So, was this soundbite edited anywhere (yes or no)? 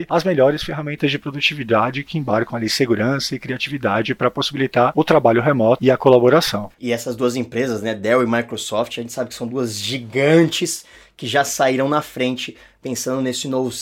yes